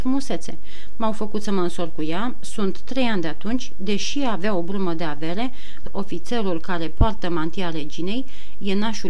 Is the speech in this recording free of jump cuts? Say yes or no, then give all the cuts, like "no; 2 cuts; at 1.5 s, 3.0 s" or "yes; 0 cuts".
no; 1 cut; at 5.8 s